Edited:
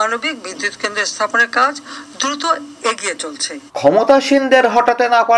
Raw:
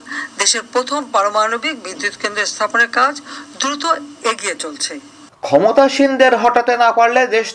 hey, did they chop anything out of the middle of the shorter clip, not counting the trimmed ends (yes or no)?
yes